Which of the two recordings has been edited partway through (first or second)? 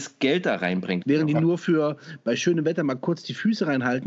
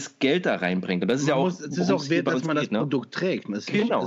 first